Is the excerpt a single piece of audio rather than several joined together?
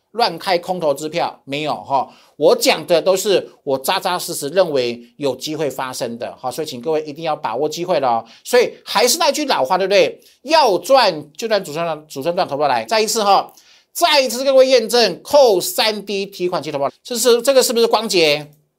no; 2 cuts; at 12.9 s, 16.9 s

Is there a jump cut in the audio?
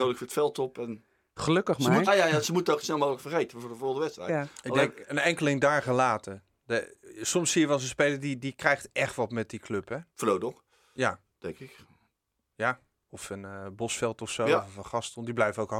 yes; 2 cuts; at 2.1 s, 10.1 s

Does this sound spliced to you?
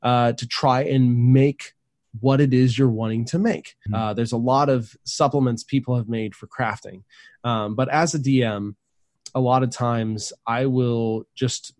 yes; 1 cut; at 3.9 s

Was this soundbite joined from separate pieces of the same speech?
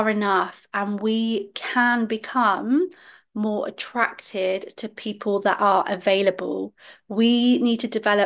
no; 0 cuts

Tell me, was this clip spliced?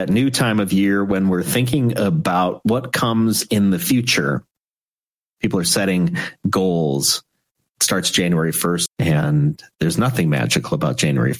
yes; 2 cuts; at 7.7 s, 8.9 s

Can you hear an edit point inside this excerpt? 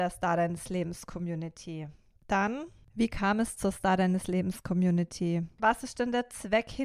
yes; 2 cuts; at 2.2 s, 5.6 s

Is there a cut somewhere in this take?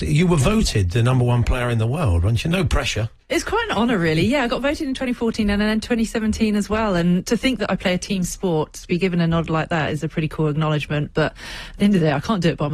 no; 0 cuts

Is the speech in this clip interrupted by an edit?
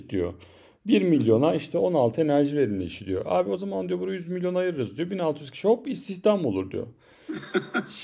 no; 0 cuts

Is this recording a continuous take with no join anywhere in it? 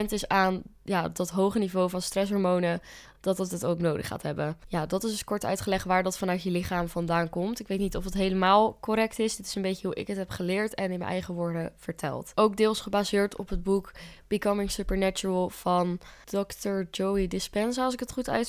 yes; 0 cuts

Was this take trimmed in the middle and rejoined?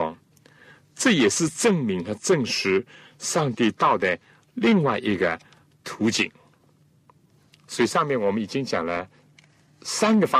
no; 0 cuts

